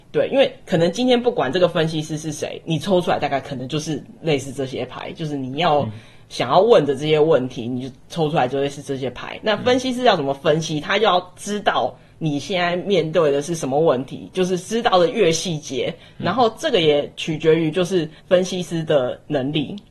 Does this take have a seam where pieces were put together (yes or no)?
yes